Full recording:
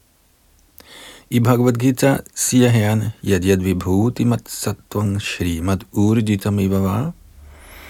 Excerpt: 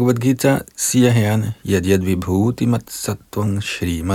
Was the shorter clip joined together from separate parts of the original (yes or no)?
no